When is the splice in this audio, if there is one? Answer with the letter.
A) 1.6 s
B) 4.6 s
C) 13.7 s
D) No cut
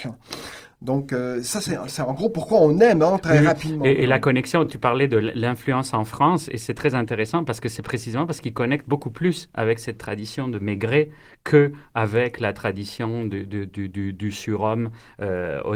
D